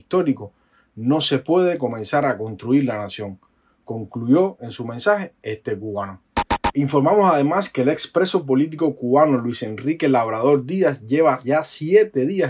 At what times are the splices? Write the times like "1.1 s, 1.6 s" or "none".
none